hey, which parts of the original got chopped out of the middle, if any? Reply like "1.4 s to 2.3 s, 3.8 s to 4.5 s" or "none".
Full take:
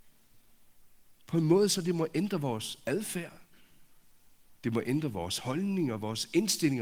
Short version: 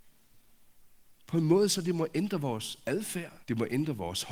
3.4 s to 4.6 s